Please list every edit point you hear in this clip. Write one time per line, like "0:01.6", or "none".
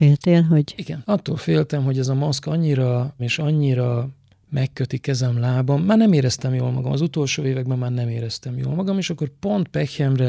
0:03.2